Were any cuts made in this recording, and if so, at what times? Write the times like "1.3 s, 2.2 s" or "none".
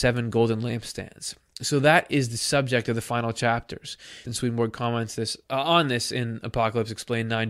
4.3 s, 5.4 s